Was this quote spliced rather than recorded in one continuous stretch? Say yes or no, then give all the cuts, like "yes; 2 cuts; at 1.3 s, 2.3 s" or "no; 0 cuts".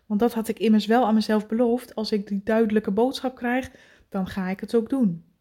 no; 0 cuts